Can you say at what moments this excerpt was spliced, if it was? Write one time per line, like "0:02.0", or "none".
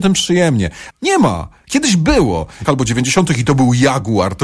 0:00.9
0:02.6